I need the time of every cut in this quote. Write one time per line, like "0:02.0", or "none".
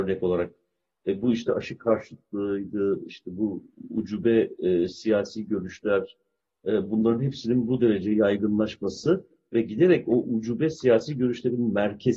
none